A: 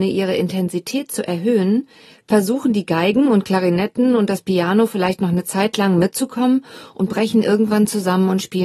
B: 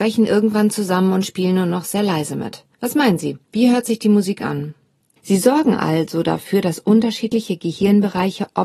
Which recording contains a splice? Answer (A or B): B